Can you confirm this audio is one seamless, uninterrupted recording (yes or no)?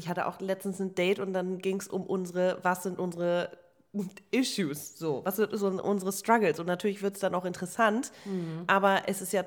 yes